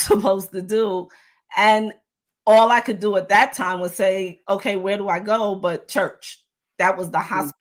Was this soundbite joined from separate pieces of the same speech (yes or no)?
no